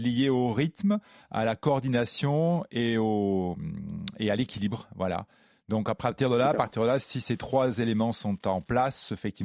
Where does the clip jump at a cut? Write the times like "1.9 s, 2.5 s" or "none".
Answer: none